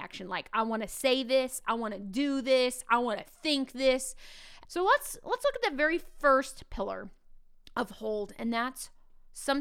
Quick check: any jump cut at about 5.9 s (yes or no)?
no